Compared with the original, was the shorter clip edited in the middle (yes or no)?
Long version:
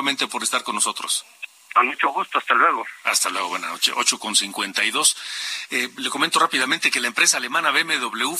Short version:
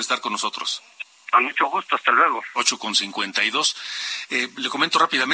yes